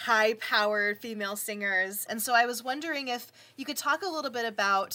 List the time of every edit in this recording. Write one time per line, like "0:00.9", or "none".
0:02.1